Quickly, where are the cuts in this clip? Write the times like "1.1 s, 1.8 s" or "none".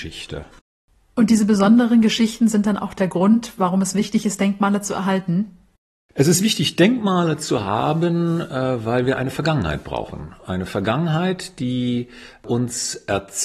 none

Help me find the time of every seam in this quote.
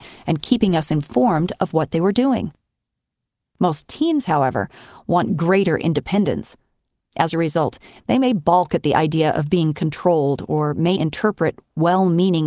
3.4 s, 11.0 s

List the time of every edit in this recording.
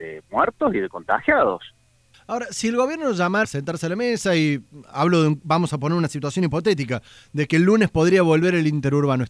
2.1 s, 3.4 s

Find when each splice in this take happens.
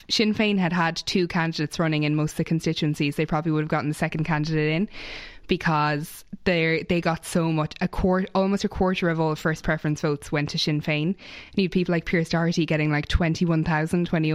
none

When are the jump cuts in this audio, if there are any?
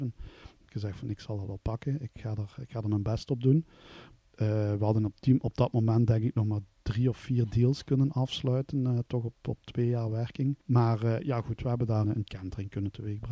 10.6 s, 12.0 s

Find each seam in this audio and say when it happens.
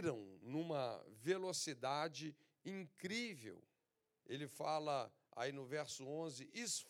4.2 s

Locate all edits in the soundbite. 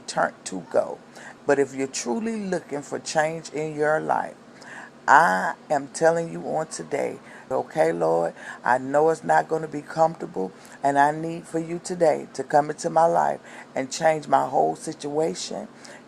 1.4 s, 7.5 s, 10.8 s

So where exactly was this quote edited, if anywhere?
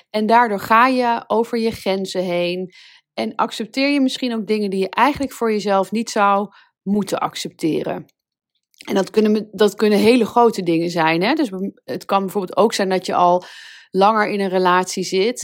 none

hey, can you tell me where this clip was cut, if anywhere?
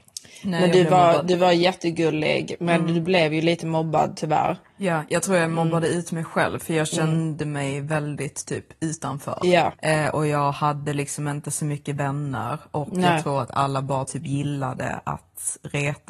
9.7 s

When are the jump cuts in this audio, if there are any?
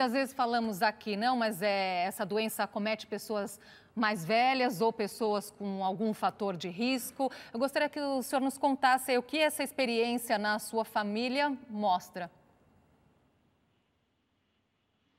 none

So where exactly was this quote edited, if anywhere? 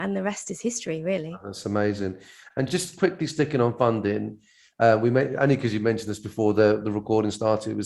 none

